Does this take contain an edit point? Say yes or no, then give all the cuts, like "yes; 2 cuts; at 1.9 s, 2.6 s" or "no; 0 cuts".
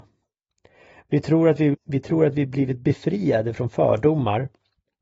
yes; 1 cut; at 1.7 s